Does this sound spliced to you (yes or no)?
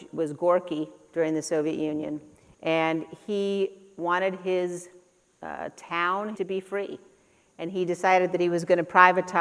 yes